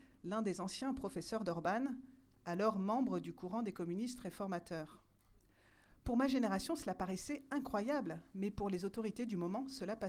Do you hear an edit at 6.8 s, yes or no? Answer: no